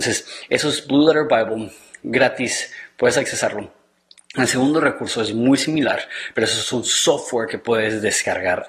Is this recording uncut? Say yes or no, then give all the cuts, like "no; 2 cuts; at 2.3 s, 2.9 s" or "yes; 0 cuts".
yes; 0 cuts